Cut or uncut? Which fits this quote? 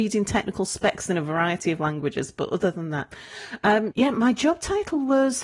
cut